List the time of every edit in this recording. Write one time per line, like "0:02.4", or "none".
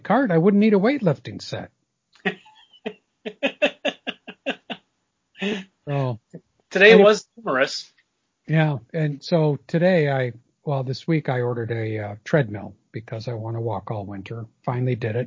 none